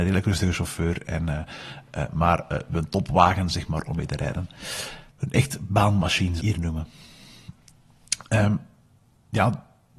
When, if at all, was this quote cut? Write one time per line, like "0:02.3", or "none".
0:05.1
0:06.4